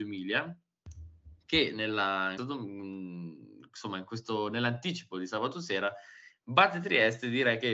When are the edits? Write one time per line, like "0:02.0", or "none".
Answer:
0:02.4

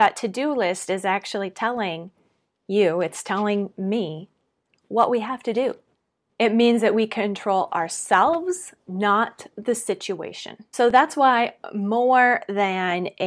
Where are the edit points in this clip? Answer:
0:06.3

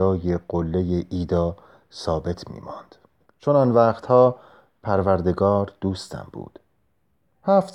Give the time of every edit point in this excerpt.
0:03.2

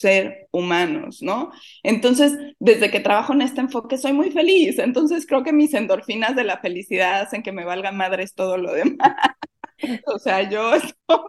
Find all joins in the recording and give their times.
0:10.0

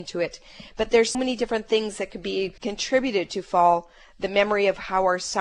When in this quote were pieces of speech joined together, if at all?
0:01.1
0:02.6

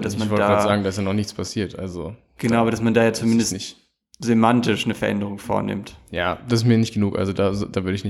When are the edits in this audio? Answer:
none

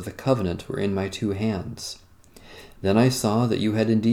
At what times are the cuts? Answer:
none

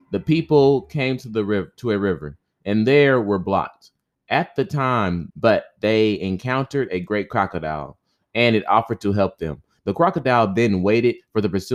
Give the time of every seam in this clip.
0:05.3
0:09.8

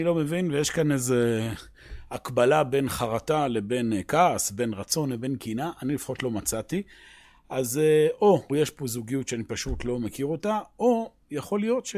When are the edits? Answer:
0:08.5

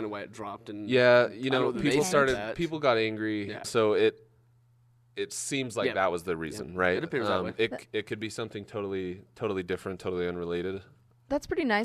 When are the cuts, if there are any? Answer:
0:03.6

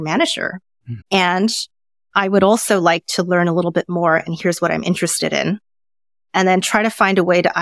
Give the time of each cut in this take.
0:01.0

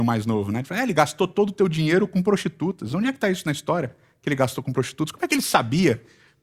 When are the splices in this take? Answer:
none

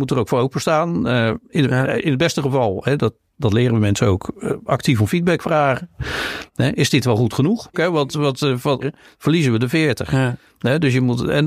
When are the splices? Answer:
0:07.7
0:08.8

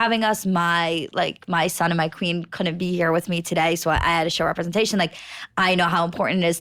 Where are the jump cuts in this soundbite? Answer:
none

